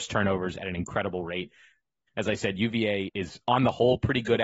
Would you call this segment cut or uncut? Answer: cut